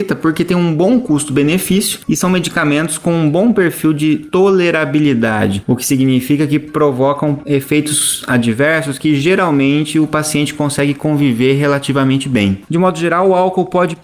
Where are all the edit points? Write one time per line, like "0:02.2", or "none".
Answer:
0:12.7

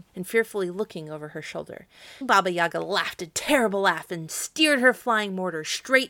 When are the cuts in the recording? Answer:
0:02.2

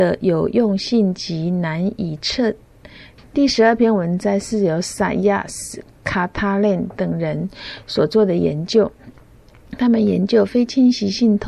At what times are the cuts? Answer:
0:03.2

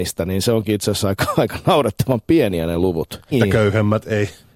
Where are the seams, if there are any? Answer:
0:03.3

